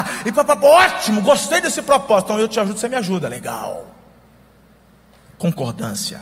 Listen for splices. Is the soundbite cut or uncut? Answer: uncut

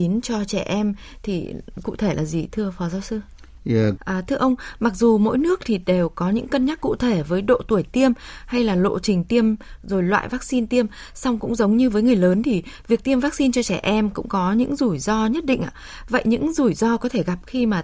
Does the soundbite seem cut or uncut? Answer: cut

